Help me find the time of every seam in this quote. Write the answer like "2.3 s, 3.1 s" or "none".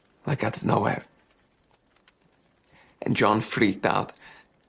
none

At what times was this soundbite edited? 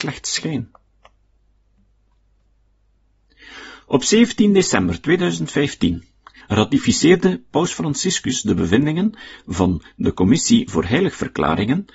6.4 s

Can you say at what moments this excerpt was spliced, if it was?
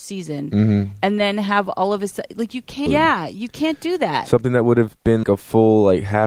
2.9 s, 5.2 s

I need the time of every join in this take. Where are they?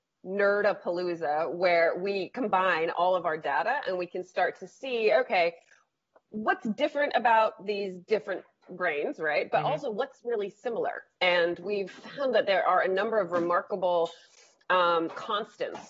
none

